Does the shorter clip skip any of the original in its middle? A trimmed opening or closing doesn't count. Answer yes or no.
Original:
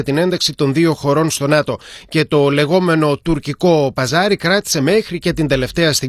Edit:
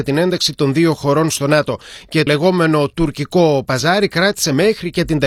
yes